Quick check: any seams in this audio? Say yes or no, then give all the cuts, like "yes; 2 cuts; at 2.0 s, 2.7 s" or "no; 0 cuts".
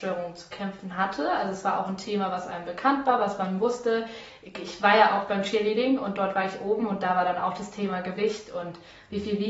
no; 0 cuts